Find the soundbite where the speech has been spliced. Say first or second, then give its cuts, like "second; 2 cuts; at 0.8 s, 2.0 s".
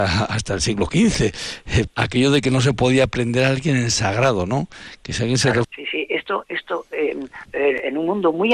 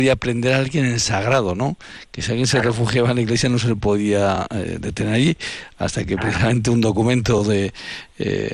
first; 3 cuts; at 1.9 s, 5.6 s, 7.5 s